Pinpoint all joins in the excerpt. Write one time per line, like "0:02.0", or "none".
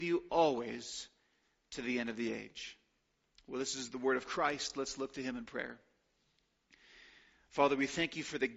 none